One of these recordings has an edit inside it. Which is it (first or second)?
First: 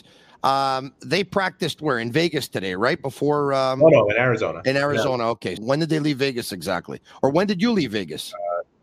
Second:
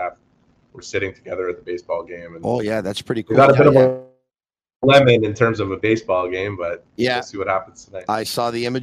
first